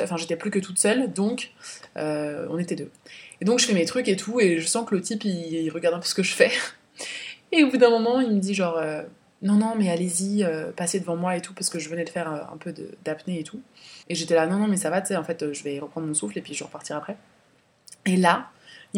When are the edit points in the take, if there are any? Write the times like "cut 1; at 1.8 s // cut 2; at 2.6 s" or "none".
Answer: cut 1; at 14.0 s